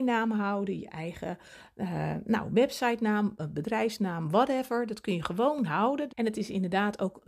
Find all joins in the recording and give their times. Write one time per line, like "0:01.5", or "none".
0:06.1